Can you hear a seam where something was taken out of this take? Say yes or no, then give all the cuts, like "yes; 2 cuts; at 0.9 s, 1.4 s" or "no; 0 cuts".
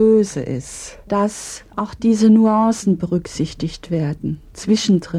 no; 0 cuts